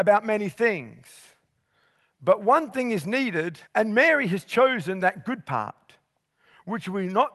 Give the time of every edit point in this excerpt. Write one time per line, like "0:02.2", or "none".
0:03.7